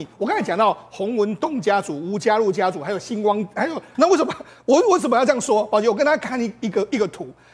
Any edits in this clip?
yes; 1 cut; at 3.9 s

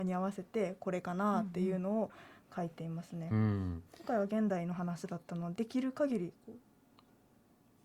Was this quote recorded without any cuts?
no; 1 cut; at 5.5 s

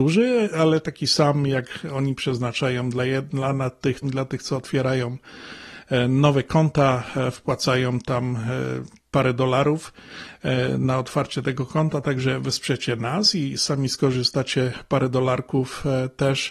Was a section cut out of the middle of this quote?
yes; 1 cut; at 4.0 s

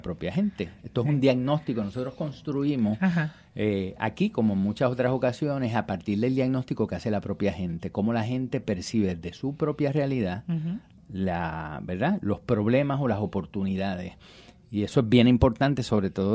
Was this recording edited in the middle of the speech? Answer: no; 0 cuts

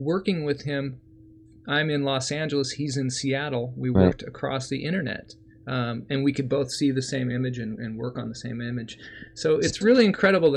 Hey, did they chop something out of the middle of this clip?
no; 0 cuts

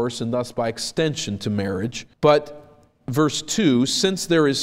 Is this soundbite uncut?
no; 1 cut; at 2.1 s

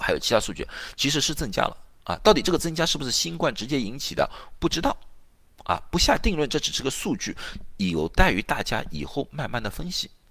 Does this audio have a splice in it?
no; 0 cuts

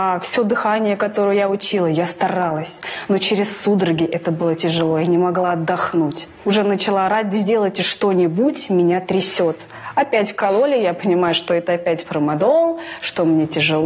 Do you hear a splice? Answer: no; 0 cuts

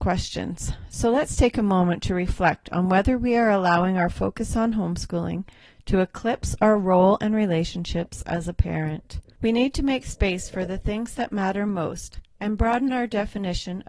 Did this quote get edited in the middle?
no; 0 cuts

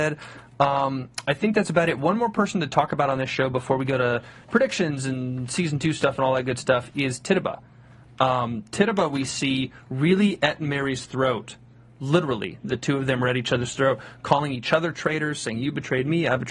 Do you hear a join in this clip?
no; 0 cuts

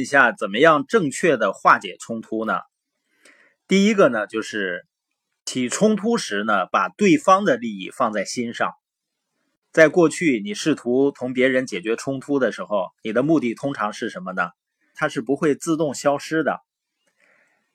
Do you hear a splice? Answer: yes; 1 cut; at 14.9 s

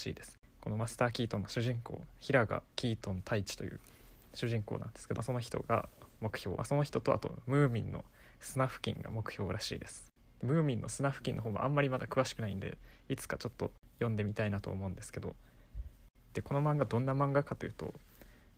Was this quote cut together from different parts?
yes; 2 cuts; at 5.2 s, 6.6 s

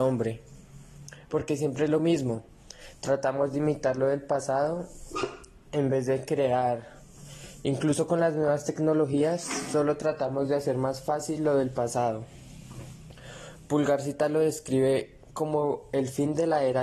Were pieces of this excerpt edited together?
no; 0 cuts

